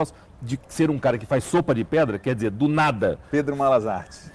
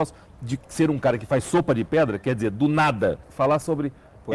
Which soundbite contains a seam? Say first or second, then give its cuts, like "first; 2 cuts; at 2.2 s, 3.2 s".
second; 1 cut; at 3.2 s